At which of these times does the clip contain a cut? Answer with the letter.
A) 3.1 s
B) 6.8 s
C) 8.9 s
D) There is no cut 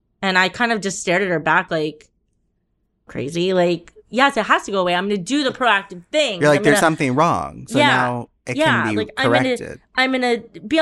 A